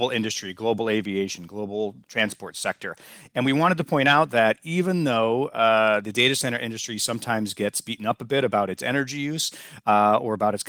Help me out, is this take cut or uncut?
uncut